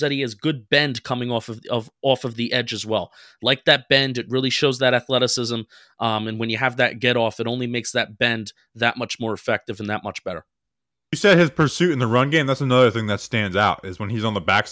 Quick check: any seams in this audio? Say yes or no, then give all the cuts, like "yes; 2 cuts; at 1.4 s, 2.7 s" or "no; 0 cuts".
no; 0 cuts